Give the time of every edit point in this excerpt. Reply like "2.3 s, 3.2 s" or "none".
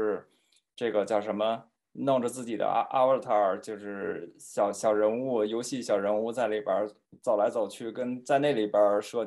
none